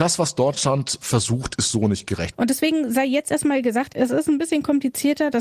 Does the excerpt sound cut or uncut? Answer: cut